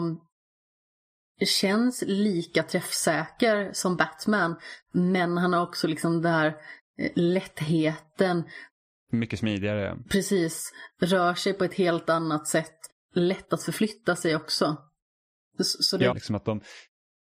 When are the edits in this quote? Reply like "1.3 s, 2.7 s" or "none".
13.0 s, 16.1 s